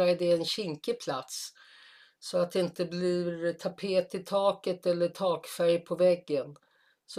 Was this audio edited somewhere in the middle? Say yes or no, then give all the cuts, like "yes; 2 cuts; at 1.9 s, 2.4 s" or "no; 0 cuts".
no; 0 cuts